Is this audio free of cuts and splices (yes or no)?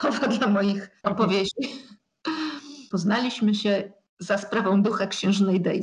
no